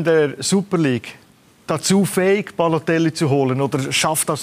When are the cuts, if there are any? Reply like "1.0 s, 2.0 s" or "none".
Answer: none